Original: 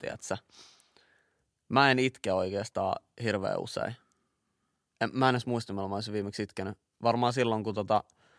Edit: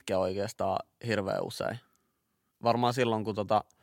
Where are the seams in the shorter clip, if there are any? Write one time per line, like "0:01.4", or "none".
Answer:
0:02.5